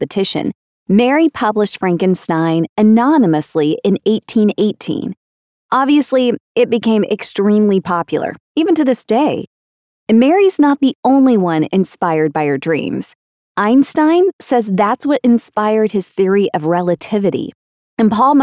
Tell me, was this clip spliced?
no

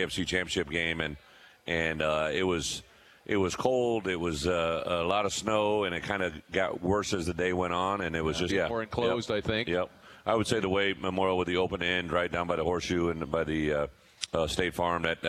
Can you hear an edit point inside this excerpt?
yes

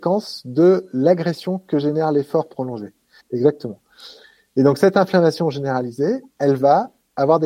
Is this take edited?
yes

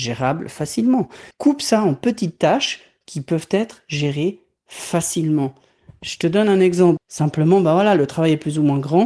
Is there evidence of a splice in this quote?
yes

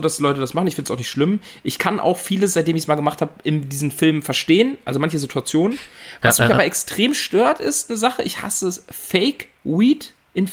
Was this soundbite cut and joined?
no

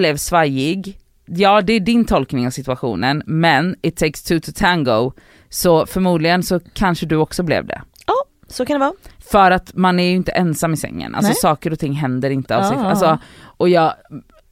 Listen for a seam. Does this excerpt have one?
no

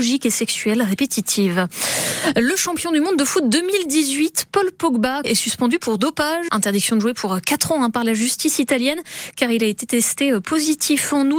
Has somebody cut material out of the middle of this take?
yes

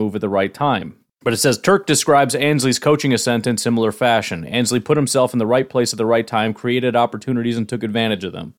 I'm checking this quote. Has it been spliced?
yes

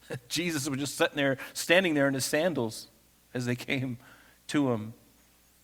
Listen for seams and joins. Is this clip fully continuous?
yes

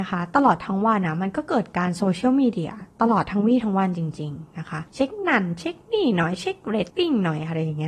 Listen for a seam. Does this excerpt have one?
yes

